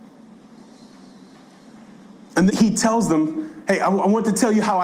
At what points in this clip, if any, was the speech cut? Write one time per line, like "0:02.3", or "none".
0:02.5

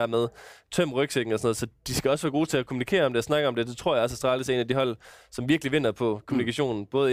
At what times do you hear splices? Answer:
none

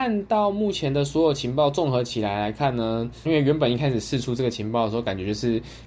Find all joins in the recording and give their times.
0:03.3

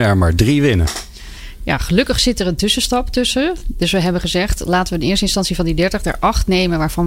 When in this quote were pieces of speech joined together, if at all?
none

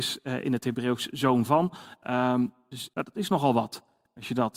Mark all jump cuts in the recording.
0:02.9

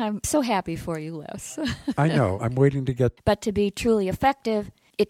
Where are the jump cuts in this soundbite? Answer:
0:03.2

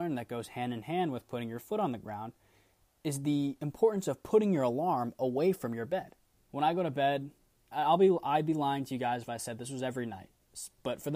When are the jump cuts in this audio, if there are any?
0:06.4

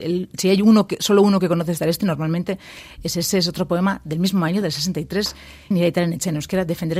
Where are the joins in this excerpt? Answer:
0:05.7

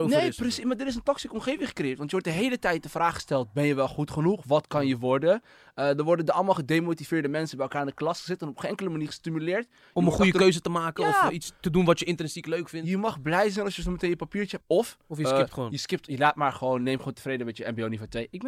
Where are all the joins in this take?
0:14.6

